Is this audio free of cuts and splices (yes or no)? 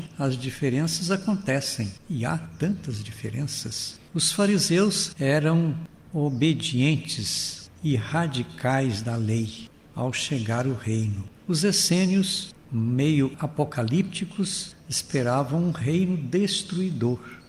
yes